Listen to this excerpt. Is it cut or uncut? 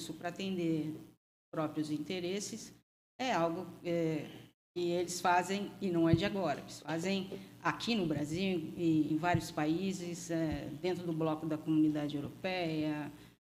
cut